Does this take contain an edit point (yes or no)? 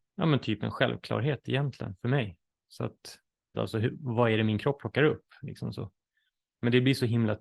yes